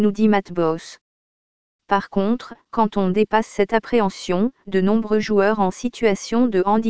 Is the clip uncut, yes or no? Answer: yes